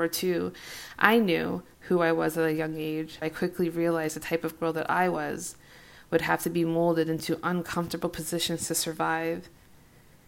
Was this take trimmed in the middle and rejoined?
yes; 1 cut; at 3.2 s

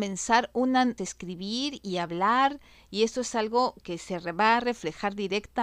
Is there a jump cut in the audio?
yes; 1 cut; at 1.0 s

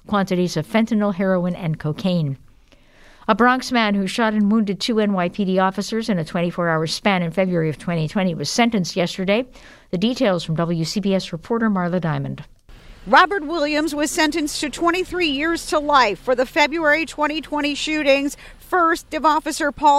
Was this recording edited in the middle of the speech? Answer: no; 0 cuts

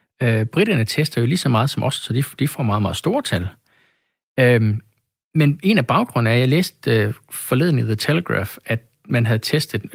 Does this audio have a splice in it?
no; 0 cuts

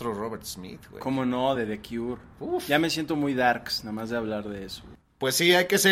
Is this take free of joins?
yes; 0 cuts

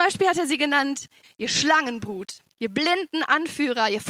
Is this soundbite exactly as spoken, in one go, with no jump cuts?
no; 2 cuts; at 1.2 s, 2.5 s

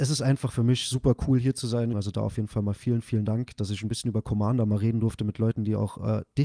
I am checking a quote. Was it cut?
yes; 1 cut; at 1.9 s

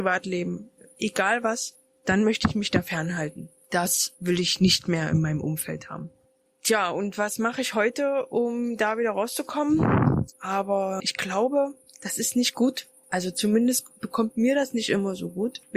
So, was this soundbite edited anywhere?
yes; 1 cut; at 10.3 s

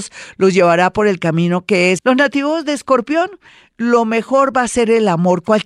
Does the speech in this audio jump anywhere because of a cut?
yes; 1 cut; at 2.0 s

